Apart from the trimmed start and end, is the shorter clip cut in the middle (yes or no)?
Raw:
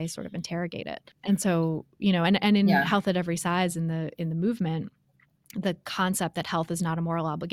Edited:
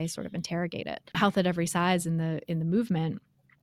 yes